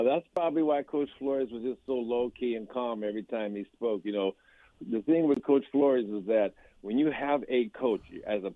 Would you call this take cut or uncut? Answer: uncut